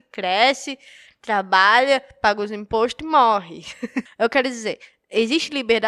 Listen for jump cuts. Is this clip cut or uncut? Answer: cut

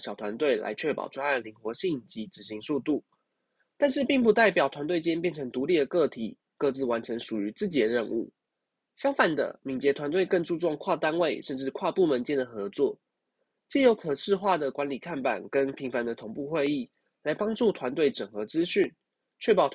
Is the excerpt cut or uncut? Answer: uncut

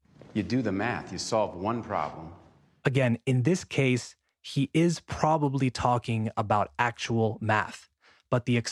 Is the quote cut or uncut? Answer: uncut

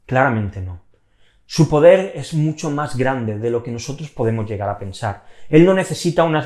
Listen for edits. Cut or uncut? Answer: uncut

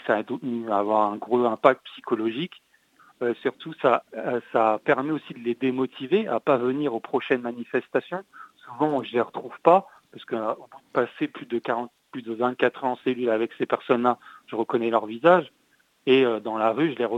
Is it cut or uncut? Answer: cut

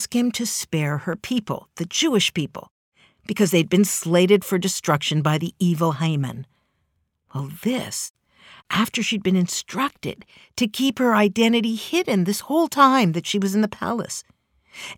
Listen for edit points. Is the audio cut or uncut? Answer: uncut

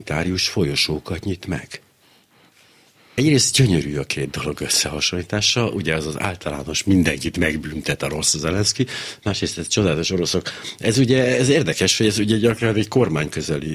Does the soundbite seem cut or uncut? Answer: uncut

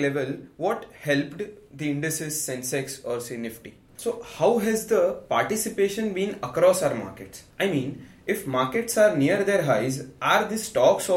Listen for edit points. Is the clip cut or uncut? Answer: cut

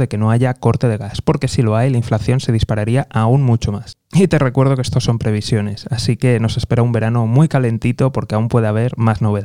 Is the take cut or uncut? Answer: uncut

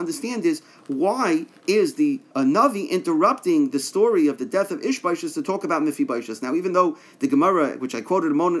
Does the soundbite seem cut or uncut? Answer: cut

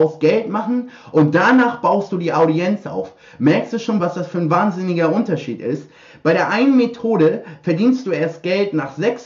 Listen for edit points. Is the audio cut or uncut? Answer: cut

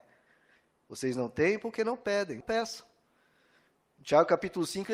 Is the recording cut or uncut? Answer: cut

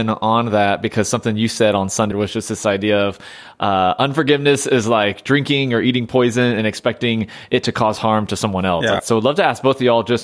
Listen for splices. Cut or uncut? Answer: cut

